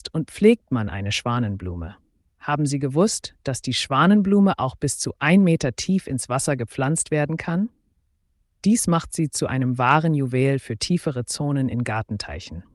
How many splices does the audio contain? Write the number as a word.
one